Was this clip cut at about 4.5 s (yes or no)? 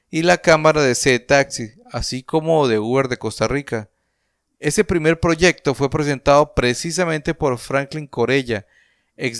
yes